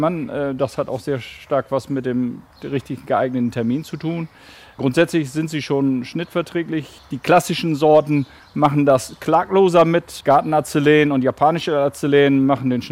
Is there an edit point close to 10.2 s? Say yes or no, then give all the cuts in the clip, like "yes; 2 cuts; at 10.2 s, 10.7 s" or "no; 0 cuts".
yes; 1 cut; at 10.2 s